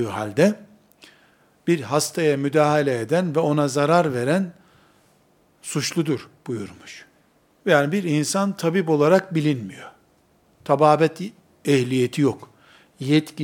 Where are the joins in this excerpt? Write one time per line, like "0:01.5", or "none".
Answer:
0:07.5